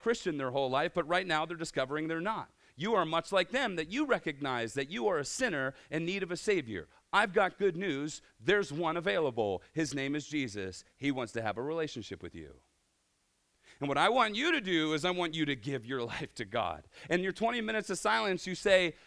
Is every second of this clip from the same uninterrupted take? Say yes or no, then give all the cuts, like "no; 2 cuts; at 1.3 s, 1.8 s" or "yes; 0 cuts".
yes; 0 cuts